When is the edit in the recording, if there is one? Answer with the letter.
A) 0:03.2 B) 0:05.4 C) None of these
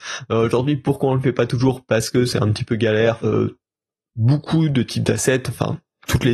A